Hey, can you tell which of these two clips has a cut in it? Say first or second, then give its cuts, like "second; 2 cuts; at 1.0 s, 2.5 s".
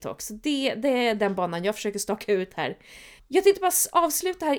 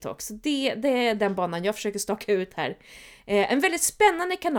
first; 1 cut; at 3.2 s